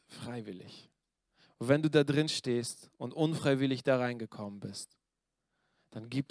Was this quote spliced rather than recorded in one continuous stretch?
no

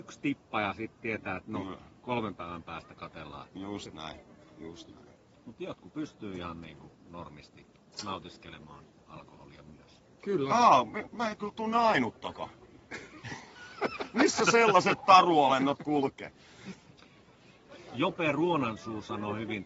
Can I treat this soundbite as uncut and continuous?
no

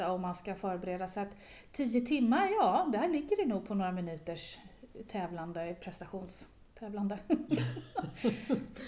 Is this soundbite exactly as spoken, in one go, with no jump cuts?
yes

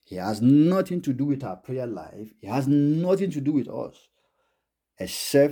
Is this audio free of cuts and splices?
yes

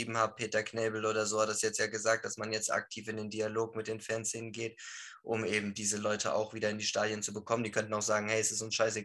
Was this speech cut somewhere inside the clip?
no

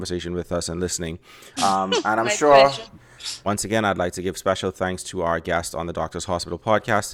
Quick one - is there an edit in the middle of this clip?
yes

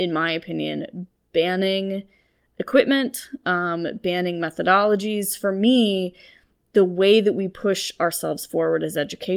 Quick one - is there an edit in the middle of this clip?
no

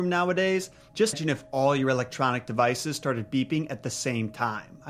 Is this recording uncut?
no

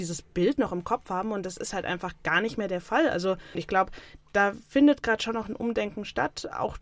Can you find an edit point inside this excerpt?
no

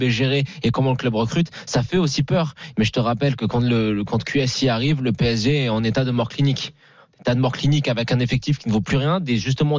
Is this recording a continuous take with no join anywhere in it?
no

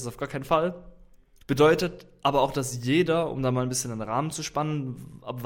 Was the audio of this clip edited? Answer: yes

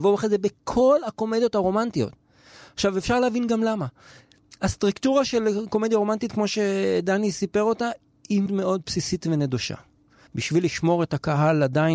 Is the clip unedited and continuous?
no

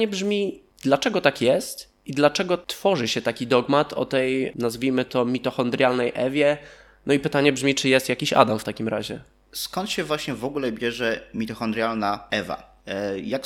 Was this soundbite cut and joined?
no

